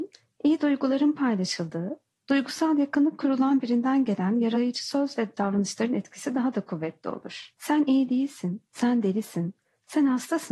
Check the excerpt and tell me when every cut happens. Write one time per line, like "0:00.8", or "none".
0:07.5